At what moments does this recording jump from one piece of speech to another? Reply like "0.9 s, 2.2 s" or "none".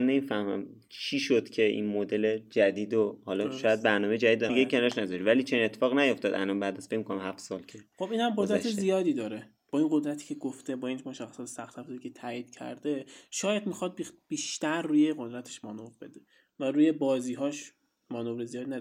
4.5 s